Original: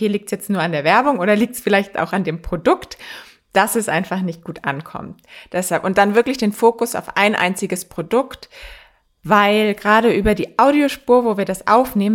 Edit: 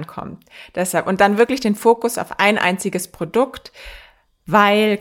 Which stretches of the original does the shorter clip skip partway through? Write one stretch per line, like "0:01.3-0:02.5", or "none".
none